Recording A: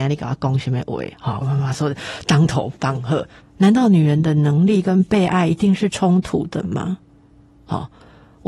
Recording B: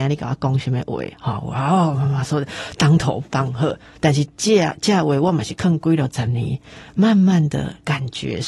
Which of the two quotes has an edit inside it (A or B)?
A